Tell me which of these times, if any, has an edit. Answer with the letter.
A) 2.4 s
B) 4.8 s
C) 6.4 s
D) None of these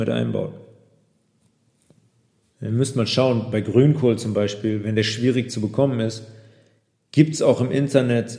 A